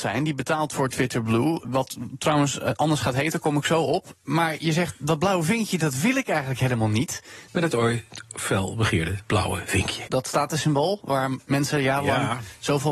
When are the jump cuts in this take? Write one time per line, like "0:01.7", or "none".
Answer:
0:01.6
0:07.5
0:10.1